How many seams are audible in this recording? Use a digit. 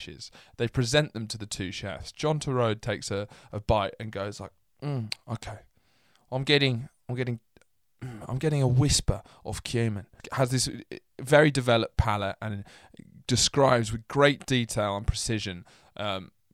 0